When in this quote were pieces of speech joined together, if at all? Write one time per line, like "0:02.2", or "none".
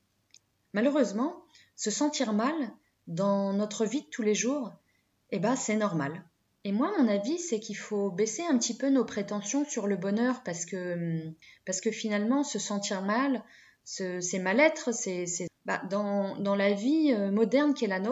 0:15.5